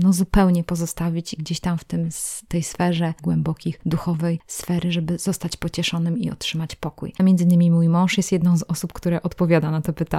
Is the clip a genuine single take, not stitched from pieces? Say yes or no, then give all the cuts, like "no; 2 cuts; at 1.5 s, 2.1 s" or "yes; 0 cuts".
no; 2 cuts; at 3.2 s, 7.2 s